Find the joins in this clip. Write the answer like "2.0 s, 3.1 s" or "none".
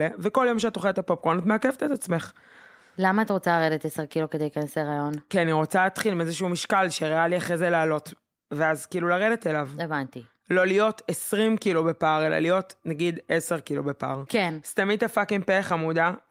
14.3 s